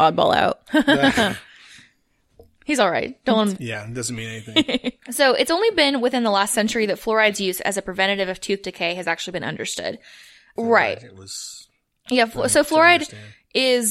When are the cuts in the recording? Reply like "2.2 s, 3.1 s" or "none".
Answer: 3.6 s, 10.6 s